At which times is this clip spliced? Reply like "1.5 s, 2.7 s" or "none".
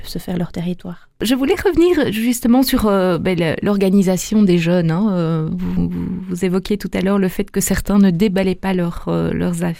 none